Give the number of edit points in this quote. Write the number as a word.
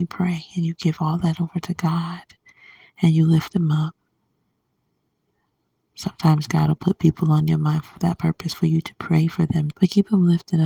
one